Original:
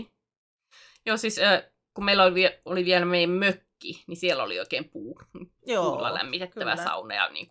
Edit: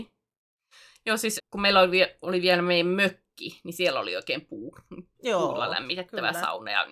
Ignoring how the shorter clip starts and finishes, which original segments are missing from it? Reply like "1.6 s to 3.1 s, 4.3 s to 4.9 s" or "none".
1.4 s to 1.8 s